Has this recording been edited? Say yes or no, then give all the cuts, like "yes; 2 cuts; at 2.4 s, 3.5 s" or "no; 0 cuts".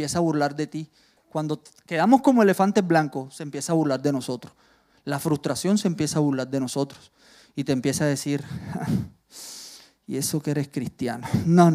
no; 0 cuts